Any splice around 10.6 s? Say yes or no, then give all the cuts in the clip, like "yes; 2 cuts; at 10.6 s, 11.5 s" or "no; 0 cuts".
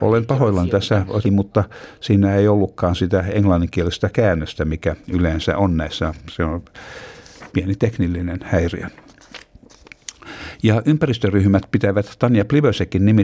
no; 1 cut; at 1.2 s